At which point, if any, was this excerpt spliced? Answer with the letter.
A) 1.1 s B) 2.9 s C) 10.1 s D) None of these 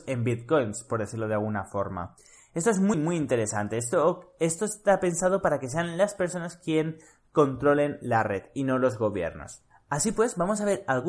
B